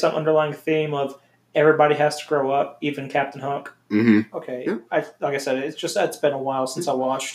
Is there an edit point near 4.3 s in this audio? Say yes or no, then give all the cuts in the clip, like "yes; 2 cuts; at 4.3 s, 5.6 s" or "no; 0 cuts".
yes; 1 cut; at 4.3 s